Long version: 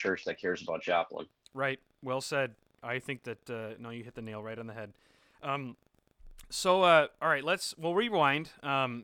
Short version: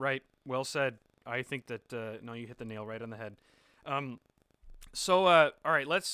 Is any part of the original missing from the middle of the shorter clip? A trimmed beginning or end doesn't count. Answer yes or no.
no